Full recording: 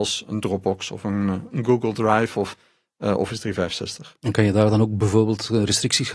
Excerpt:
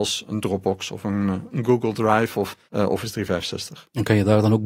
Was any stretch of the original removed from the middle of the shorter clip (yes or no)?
yes